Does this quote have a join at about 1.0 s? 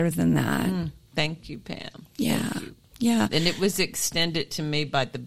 no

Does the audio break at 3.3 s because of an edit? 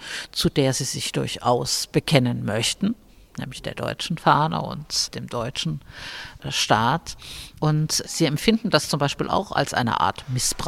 no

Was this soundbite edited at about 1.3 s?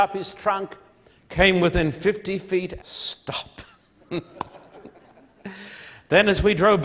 no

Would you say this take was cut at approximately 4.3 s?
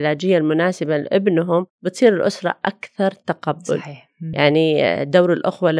yes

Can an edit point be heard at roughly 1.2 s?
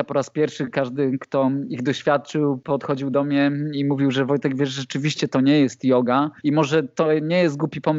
no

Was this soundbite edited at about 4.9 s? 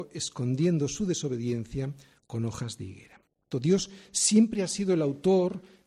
no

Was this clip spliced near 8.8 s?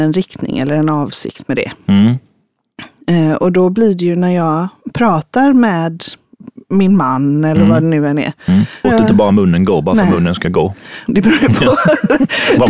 yes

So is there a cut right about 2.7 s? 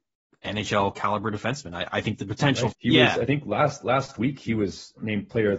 yes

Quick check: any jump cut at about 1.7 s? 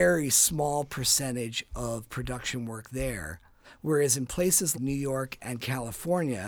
no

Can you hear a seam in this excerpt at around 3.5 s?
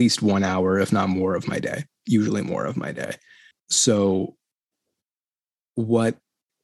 yes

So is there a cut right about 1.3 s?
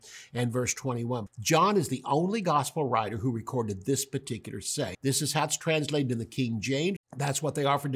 yes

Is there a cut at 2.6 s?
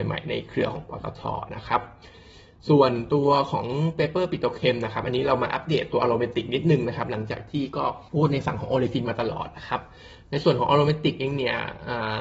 no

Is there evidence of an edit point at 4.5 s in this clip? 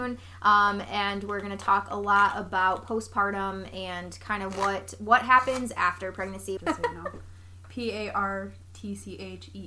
no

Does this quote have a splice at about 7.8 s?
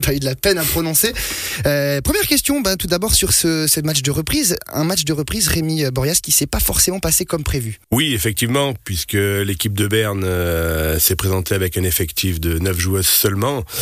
yes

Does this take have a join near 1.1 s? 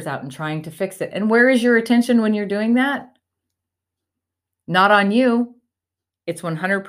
no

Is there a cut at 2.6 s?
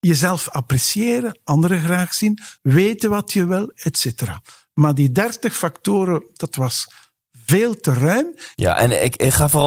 yes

